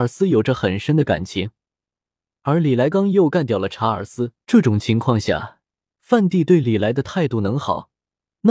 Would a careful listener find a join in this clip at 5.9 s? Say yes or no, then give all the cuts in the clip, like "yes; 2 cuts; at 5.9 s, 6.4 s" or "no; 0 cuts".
no; 2 cuts; at 2.9 s, 4.4 s